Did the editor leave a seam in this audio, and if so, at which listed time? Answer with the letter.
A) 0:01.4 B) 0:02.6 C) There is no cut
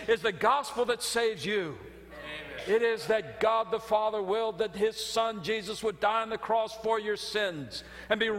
C